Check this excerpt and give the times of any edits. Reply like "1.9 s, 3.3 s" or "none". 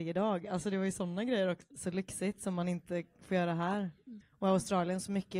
1.7 s, 4.2 s